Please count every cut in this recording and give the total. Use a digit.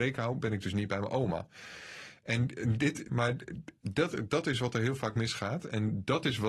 1